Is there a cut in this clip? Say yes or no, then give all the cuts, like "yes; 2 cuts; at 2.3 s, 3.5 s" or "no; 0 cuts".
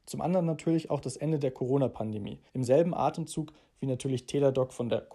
yes; 1 cut; at 2.5 s